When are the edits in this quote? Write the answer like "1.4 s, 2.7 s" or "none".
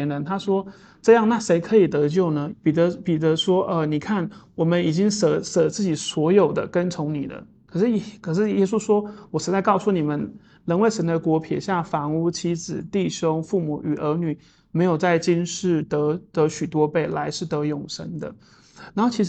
2.5 s